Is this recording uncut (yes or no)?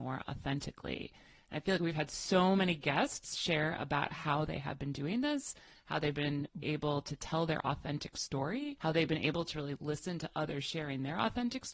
no